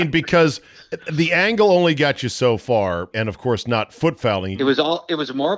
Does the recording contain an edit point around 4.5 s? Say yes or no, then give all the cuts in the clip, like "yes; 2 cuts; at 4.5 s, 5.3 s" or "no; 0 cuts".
yes; 2 cuts; at 3.1 s, 4.5 s